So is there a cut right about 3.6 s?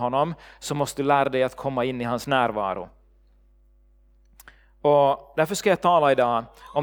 no; 0 cuts

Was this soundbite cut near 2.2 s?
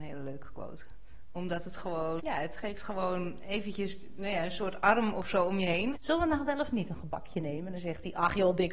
yes; 2 cuts; at 2.2 s, 5.9 s

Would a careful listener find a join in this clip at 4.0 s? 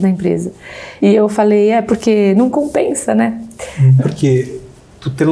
yes; 2 cuts; at 1.0 s, 4.0 s

